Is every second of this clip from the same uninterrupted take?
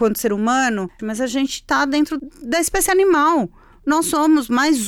no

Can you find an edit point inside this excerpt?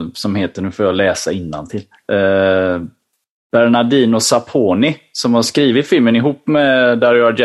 no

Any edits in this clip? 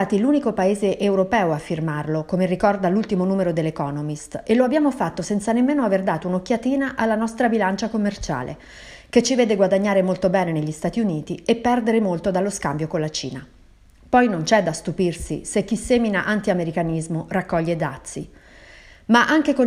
no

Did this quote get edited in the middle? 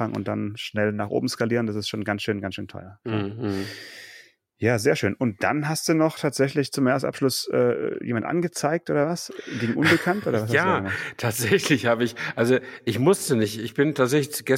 no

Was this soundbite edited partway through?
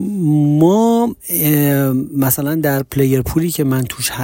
yes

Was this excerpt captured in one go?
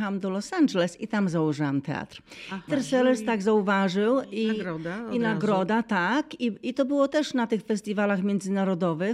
no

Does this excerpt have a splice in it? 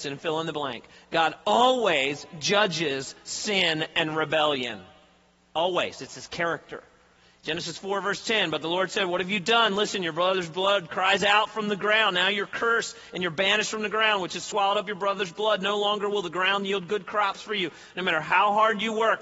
yes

